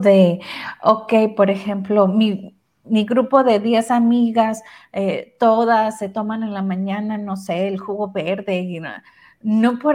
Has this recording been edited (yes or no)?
no